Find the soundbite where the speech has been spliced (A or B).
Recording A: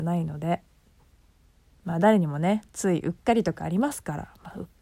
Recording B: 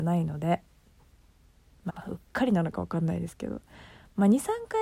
B